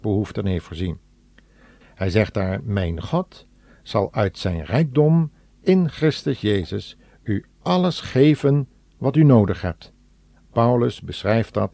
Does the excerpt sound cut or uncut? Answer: cut